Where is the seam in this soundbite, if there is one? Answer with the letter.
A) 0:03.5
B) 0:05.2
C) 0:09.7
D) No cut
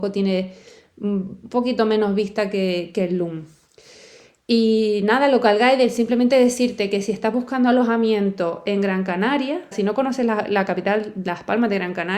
C